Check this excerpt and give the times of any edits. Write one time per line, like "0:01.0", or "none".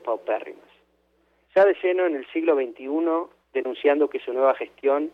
0:01.4
0:03.4